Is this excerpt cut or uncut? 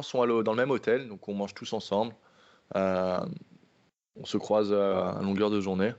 uncut